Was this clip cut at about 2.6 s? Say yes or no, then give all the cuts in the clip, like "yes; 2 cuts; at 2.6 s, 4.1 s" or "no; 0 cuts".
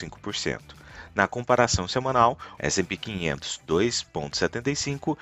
yes; 1 cut; at 2.6 s